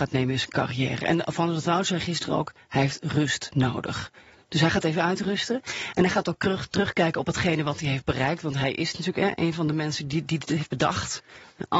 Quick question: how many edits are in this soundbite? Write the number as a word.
zero